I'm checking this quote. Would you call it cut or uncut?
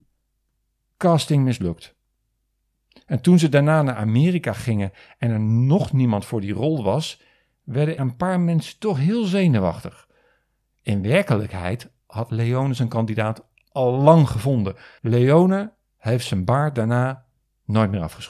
cut